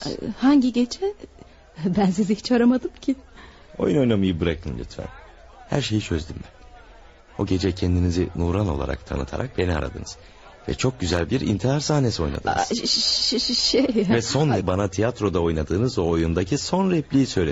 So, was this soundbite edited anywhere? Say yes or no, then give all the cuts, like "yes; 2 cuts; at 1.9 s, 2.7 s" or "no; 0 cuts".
yes; 1 cut; at 14.6 s